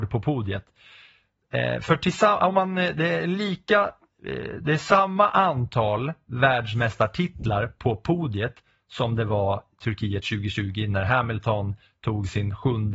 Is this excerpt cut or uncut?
uncut